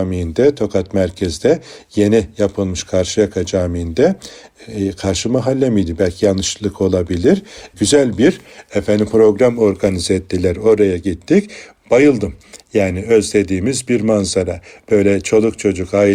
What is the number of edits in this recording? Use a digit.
0